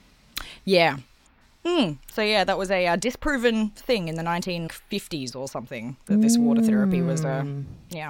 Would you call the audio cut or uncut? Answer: cut